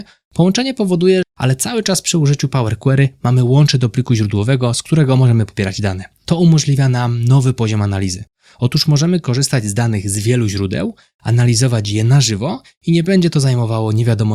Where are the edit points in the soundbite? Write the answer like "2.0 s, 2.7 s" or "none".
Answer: 1.2 s